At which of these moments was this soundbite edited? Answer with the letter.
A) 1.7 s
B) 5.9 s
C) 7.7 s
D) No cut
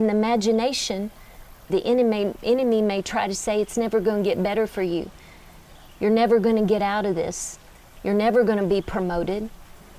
A